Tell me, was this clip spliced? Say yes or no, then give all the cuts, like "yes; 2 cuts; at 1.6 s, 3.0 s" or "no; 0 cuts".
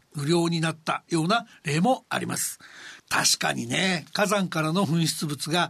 yes; 1 cut; at 3.0 s